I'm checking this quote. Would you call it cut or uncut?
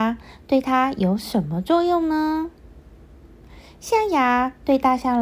uncut